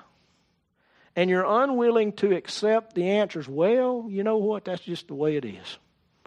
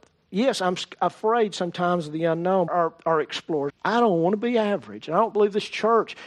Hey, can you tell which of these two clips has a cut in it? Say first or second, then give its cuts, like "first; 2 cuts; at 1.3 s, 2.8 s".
second; 2 cuts; at 2.7 s, 3.7 s